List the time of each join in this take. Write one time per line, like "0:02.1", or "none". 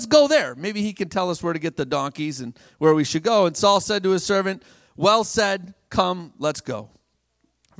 none